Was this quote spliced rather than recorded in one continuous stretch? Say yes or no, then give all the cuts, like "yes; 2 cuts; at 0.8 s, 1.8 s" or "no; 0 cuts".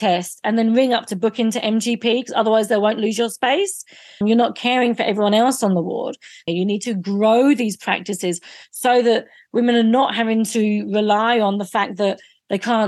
yes; 2 cuts; at 4.2 s, 6.5 s